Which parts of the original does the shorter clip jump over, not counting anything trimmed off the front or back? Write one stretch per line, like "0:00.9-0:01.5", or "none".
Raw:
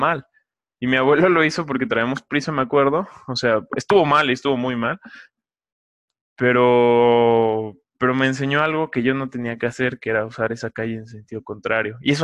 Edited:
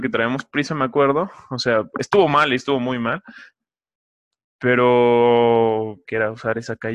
0:07.8-0:10.0